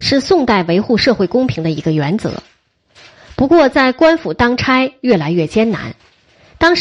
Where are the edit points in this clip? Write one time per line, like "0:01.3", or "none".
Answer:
none